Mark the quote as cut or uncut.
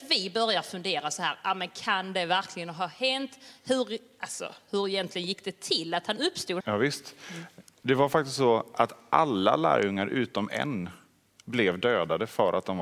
cut